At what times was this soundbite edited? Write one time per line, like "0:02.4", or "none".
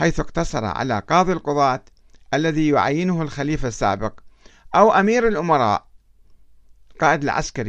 none